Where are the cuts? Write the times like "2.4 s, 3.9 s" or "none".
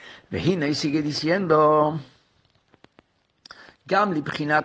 none